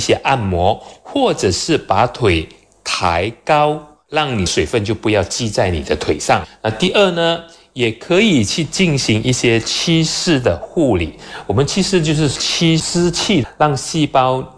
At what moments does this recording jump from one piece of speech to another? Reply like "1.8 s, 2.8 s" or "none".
none

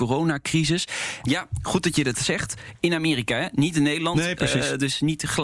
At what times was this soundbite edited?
1.2 s

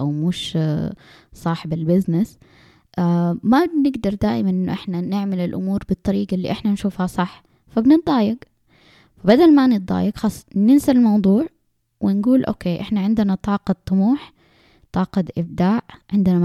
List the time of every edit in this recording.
none

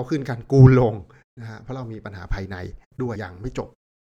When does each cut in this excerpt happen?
3.2 s

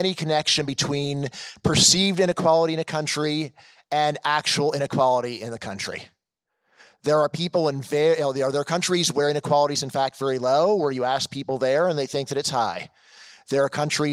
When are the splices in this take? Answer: none

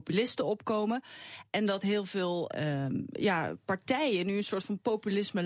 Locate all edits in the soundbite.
2.5 s

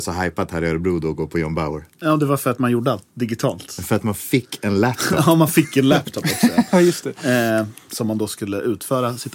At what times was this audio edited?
none

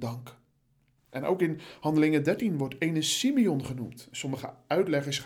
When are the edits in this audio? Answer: 1.0 s

